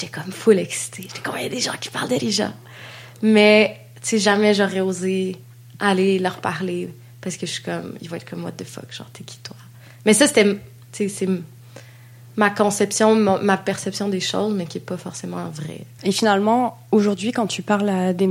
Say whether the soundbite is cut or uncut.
cut